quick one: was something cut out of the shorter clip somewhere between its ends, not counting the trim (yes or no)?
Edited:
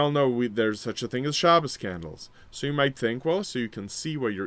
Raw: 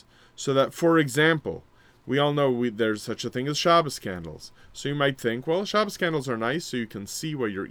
yes